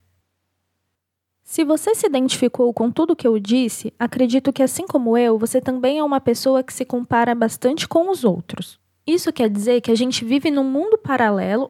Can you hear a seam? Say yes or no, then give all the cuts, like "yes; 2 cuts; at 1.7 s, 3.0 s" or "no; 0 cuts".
no; 0 cuts